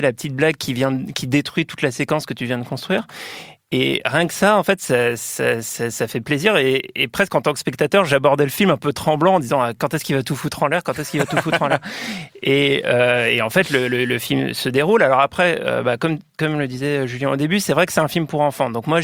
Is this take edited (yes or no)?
no